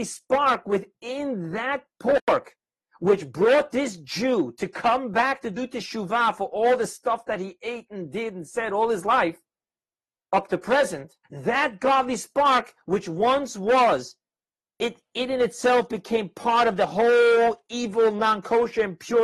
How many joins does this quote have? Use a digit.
1